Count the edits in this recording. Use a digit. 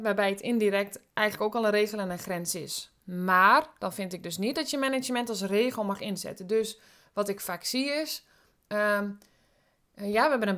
0